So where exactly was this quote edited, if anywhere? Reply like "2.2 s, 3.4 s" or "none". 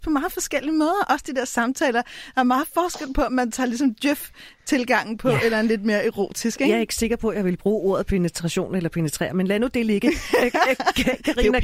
none

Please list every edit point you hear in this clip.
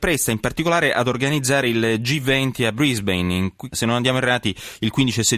3.7 s

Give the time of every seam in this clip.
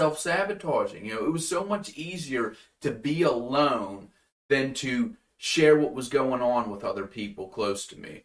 none

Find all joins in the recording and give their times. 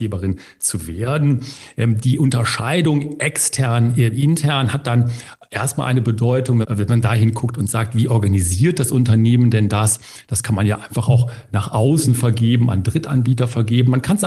6.6 s

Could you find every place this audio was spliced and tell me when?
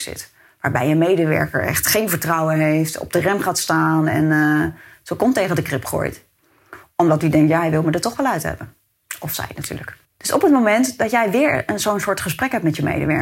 10.0 s

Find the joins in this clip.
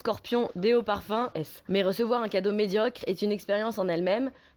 1.3 s

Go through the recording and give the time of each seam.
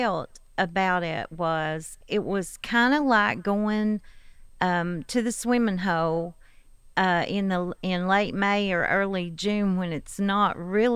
none

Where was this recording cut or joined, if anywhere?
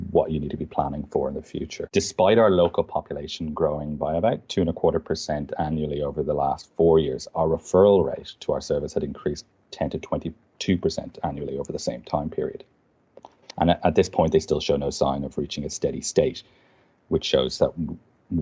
1.9 s, 13.4 s

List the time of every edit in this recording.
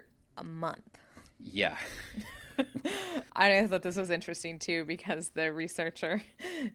1.3 s, 3.3 s

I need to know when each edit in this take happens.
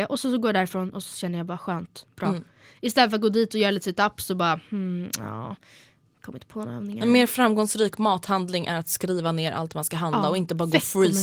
none

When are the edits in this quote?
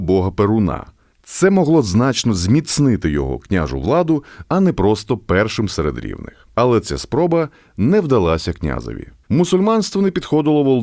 4.4 s

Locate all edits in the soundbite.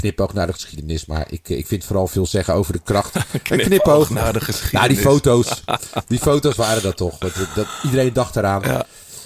none

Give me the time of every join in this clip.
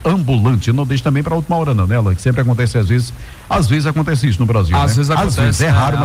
none

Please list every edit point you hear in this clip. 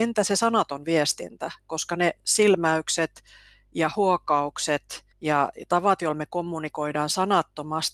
5.1 s

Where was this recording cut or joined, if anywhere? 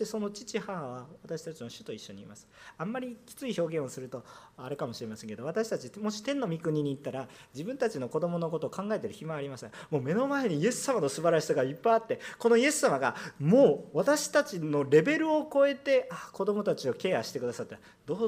none

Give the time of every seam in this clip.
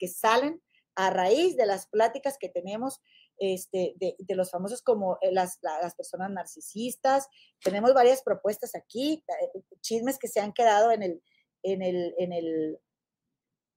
none

